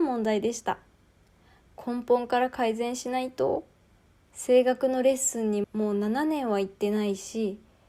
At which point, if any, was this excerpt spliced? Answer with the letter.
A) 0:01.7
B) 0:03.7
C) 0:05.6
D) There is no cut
C